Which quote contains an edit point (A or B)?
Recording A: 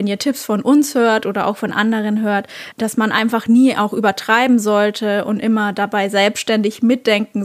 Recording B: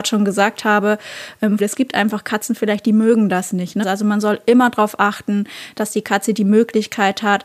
B